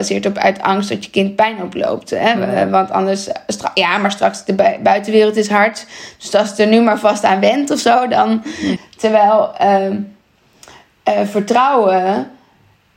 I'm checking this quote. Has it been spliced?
yes; 1 cut; at 8.8 s

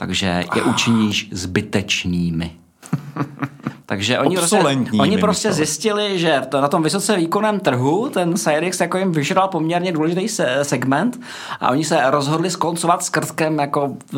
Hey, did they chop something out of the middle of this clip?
no; 0 cuts

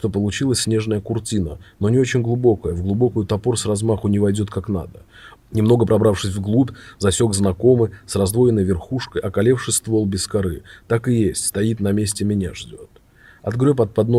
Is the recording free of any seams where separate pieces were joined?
no; 1 cut; at 5.4 s

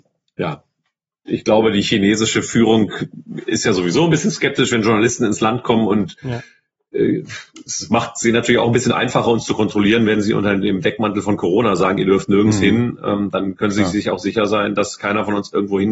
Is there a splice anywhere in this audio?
no; 0 cuts

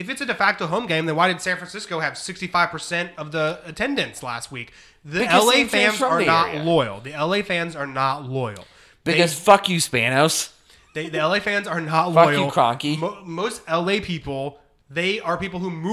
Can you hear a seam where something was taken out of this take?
no; 0 cuts

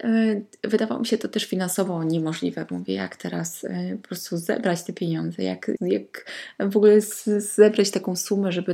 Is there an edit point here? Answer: yes; 1 cut; at 5.8 s

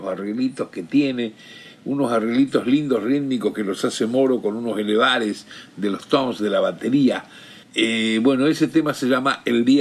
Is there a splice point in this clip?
yes; 1 cut; at 7.6 s

